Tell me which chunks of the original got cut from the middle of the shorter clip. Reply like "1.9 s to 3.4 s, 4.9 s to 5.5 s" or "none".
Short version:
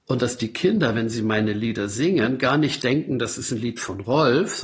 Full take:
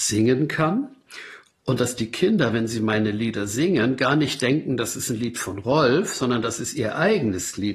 none